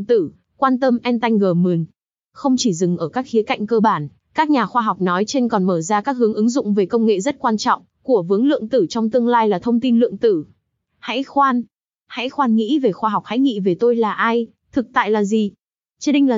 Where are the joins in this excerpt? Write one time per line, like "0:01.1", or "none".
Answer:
none